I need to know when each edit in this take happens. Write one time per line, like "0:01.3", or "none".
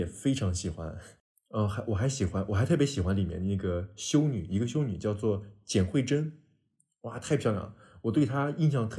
none